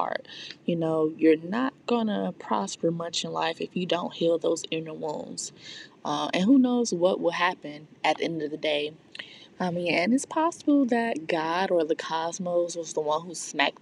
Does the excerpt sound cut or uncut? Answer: cut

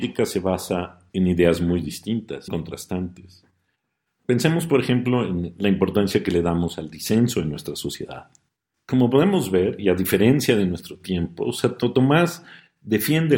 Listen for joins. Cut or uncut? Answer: cut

